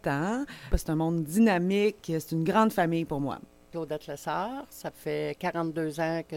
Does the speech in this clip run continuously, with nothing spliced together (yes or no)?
yes